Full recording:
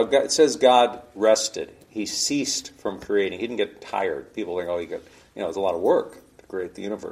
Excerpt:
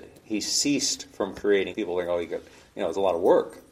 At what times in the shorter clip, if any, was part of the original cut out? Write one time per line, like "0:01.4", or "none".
0:01.7